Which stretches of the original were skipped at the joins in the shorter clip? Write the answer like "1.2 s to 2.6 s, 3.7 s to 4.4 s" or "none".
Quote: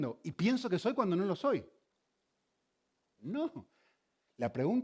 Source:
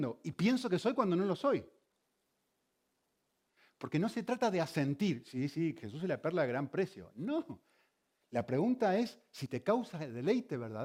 3.2 s to 7.1 s